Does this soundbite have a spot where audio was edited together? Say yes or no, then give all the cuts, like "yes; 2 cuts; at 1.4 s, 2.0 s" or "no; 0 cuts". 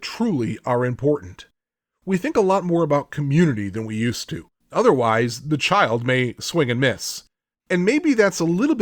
yes; 2 cuts; at 4.6 s, 7.6 s